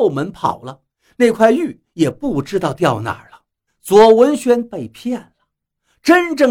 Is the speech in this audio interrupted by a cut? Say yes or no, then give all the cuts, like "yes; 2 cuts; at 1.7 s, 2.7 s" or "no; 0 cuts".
yes; 1 cut; at 3.7 s